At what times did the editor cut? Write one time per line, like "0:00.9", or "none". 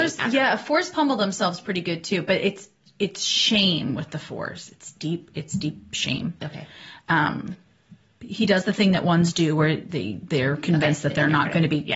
none

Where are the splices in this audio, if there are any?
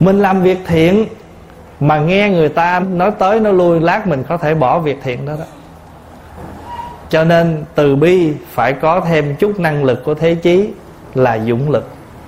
0:02.8

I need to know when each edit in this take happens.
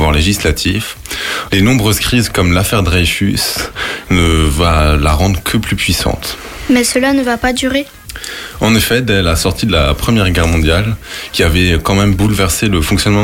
0:01.5
0:04.0

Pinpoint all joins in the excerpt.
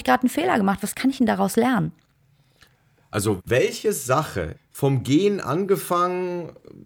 0:03.4
0:04.5

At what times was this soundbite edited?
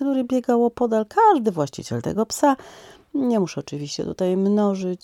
none

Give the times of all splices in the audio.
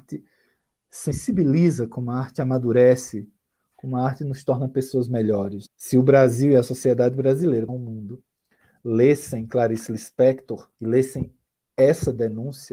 0:05.7
0:07.7
0:10.7

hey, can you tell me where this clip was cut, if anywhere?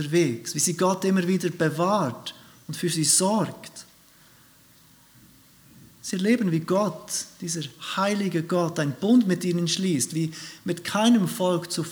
none

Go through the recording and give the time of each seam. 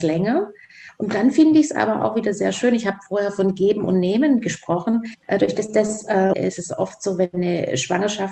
0:05.2
0:06.3

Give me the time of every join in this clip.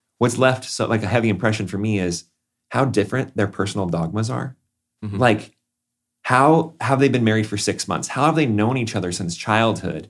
none

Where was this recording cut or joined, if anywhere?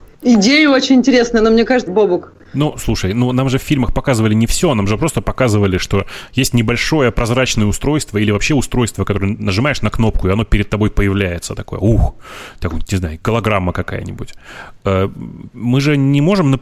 0:01.9

